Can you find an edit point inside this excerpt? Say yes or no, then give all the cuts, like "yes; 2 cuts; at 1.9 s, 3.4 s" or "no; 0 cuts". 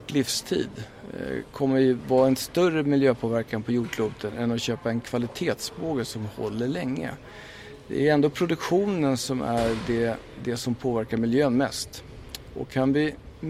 no; 0 cuts